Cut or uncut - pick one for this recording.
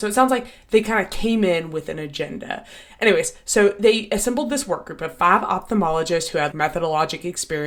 cut